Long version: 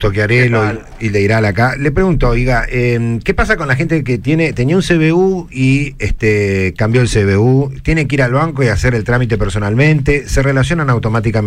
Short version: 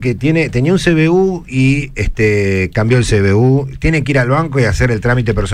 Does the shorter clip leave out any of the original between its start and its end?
no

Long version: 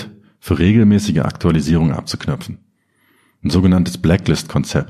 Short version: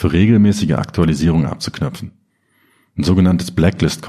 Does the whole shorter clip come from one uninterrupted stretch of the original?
yes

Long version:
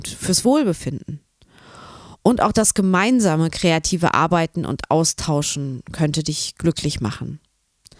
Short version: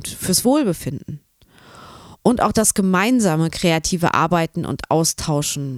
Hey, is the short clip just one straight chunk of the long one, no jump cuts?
yes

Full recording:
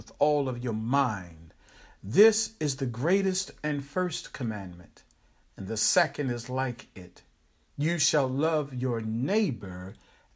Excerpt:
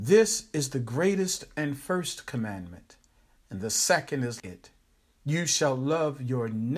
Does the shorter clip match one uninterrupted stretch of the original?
no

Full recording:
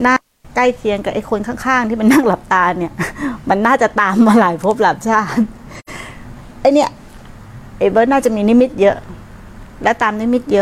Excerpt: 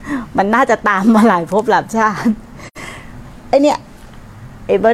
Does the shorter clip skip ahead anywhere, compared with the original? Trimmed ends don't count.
no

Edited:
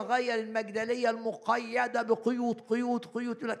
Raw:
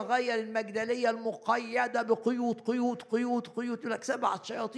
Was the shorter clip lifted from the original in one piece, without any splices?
no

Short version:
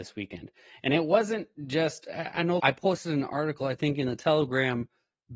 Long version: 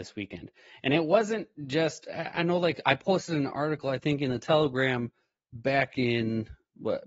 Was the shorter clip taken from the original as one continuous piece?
no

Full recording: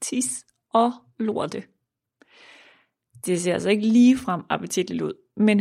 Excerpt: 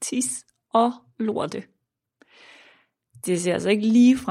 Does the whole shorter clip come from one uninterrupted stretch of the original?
yes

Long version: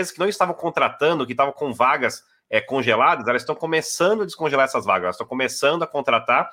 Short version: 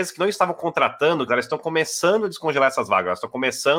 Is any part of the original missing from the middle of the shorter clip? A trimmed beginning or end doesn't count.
yes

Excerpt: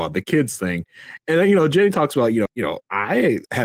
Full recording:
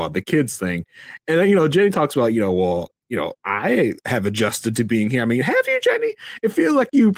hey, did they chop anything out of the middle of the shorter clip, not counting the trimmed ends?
yes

